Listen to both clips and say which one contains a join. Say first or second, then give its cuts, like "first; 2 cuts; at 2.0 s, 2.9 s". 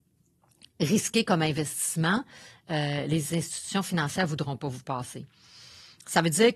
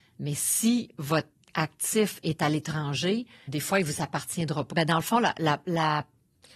second; 2 cuts; at 3.5 s, 4.7 s